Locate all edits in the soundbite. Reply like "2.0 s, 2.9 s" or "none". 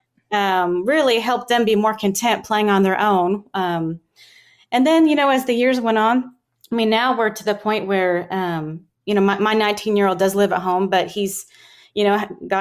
none